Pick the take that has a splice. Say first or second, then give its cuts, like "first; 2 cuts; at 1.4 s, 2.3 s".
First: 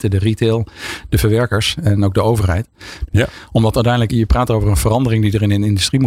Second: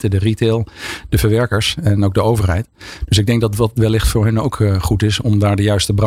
first; 2 cuts; at 3.1 s, 4.1 s